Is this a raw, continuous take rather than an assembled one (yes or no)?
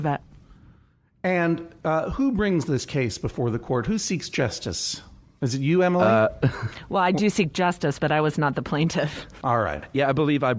yes